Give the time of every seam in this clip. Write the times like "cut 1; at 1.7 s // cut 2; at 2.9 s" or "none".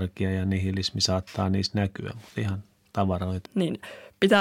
cut 1; at 3.5 s